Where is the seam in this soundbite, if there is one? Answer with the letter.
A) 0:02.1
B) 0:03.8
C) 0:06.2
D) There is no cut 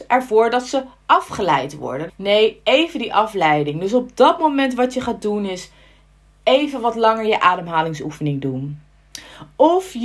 A